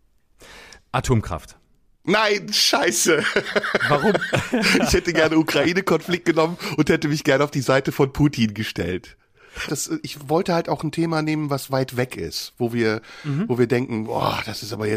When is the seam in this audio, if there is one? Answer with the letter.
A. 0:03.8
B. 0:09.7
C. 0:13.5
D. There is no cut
B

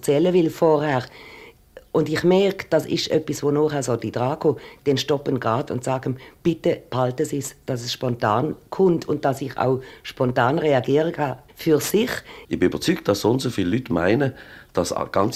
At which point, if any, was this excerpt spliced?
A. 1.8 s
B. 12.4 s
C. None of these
B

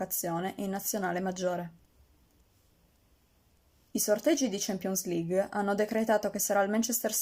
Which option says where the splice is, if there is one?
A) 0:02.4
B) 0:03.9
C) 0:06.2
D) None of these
D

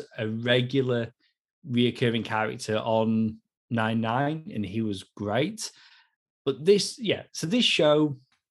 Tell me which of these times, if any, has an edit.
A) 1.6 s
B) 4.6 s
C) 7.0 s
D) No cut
D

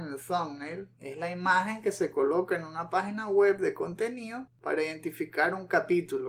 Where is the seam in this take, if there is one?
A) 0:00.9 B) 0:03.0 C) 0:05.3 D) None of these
A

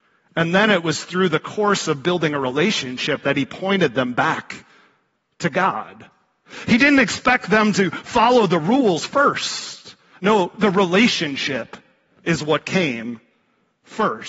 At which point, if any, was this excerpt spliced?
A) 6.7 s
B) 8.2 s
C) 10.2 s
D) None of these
D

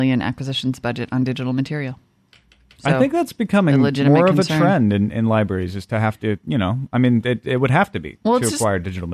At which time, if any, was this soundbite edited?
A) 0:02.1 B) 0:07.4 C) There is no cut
C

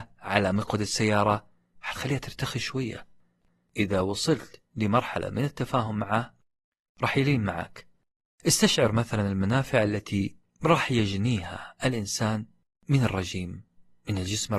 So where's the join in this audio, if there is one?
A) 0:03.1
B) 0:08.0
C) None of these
C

